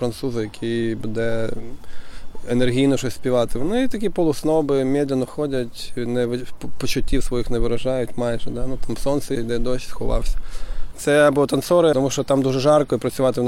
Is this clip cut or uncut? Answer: cut